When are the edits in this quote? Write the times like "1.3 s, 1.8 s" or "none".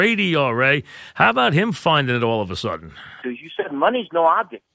3.2 s